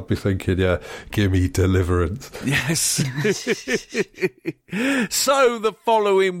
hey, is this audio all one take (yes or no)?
no